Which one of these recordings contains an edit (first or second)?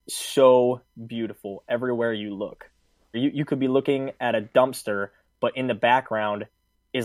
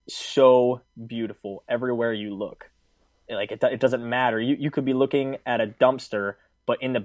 first